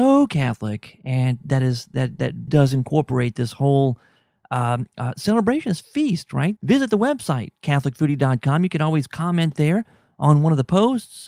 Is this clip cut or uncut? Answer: cut